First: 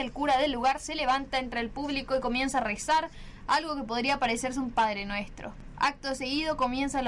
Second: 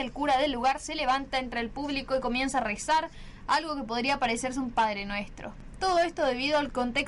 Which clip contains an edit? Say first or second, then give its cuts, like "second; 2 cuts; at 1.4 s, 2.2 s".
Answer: second; 1 cut; at 5.7 s